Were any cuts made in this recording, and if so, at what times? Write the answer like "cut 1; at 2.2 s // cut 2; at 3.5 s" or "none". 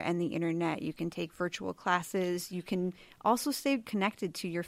none